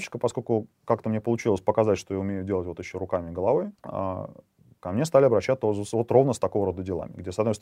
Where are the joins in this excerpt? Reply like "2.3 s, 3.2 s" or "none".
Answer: 3.8 s